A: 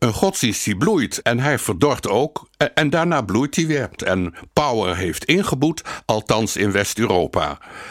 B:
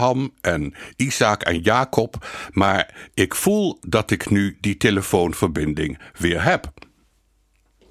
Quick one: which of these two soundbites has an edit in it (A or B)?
A